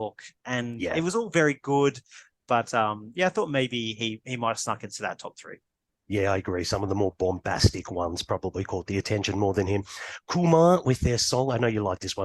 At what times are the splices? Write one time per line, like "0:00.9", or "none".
none